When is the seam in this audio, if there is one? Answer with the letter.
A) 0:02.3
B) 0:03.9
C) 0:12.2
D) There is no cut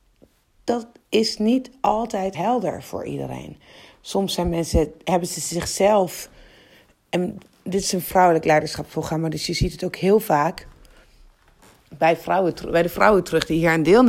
A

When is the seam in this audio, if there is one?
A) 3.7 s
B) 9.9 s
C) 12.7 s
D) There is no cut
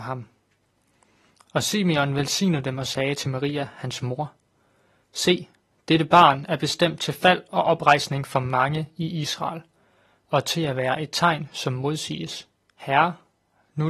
C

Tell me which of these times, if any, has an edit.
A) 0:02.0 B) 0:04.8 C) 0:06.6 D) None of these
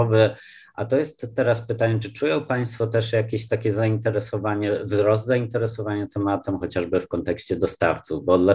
C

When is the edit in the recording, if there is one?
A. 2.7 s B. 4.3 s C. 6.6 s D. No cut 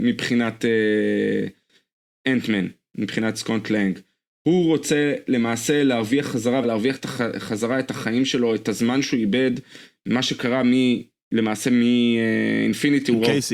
C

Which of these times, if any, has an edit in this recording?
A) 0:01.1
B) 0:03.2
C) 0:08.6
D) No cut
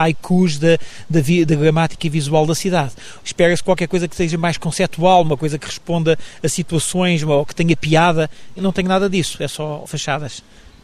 B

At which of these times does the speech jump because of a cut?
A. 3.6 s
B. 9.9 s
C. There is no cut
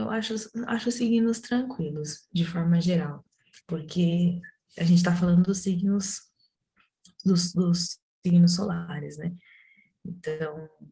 A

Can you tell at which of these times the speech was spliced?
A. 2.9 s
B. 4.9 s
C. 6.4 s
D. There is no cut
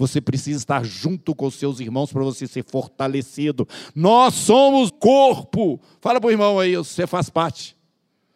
B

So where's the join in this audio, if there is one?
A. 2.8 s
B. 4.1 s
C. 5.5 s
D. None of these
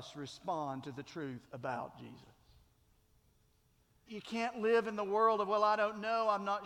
B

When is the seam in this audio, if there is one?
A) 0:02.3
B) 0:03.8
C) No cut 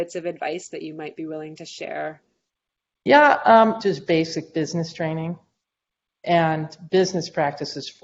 B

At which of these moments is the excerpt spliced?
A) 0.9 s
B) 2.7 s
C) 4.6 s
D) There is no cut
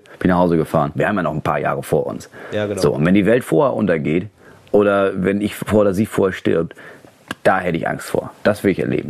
A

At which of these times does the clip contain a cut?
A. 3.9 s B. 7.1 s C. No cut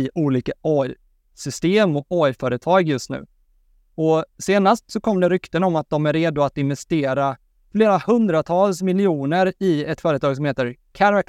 C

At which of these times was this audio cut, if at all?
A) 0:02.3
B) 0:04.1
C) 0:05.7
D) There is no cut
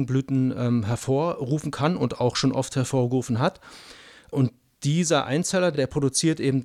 D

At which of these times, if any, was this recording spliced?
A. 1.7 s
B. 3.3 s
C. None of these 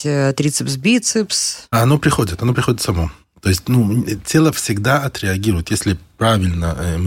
C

